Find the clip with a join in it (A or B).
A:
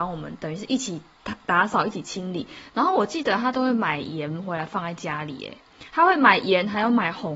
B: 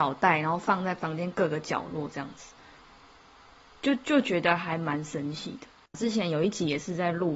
B